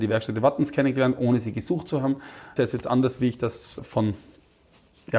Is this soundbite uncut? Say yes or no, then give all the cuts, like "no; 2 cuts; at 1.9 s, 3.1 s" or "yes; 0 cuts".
no; 2 cuts; at 2.6 s, 3.8 s